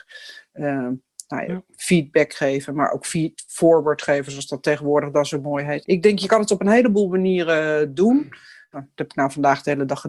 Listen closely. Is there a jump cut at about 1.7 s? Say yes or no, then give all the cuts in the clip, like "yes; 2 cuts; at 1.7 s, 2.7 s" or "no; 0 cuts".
no; 2 cuts; at 5.8 s, 8.7 s